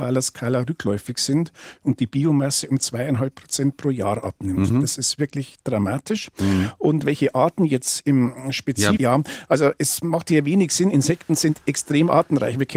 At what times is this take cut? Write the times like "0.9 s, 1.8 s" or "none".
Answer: 9.0 s